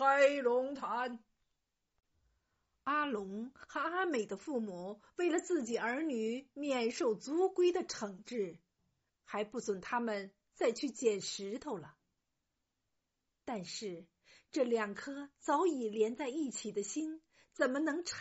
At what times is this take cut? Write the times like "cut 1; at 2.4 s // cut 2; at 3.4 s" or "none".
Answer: cut 1; at 9.1 s